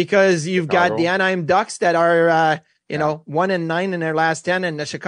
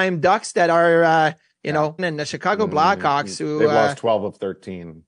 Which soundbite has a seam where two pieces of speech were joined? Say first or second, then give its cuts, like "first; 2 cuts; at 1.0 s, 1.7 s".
second; 1 cut; at 2.0 s